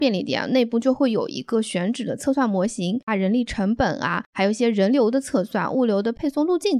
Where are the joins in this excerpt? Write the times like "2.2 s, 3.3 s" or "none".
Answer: 3.1 s, 4.3 s